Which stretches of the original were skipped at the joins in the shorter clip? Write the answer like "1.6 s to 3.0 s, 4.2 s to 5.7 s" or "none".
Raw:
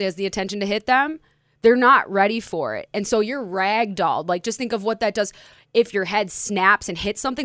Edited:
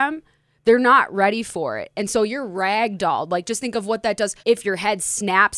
5.4 s to 5.7 s

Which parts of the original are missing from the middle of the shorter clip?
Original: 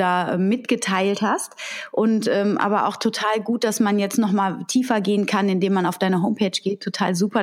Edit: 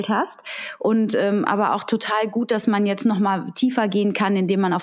none

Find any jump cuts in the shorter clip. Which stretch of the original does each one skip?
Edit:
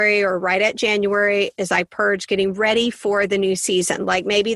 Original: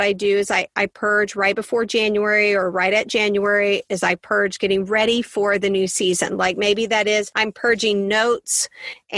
none

